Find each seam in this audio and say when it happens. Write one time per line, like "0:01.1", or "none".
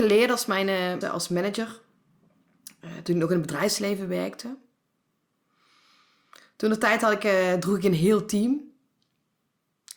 0:01.0